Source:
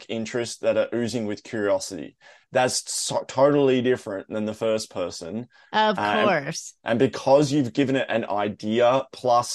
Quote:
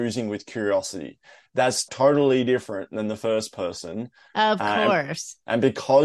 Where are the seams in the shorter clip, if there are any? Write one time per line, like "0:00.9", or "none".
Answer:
0:01.9